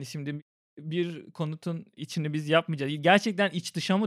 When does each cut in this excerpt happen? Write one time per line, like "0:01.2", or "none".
none